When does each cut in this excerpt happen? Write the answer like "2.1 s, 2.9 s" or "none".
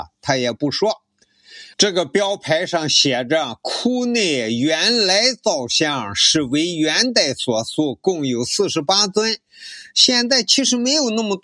1.7 s